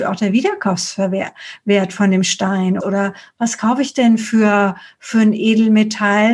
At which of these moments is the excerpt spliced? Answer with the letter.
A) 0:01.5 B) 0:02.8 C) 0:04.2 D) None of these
B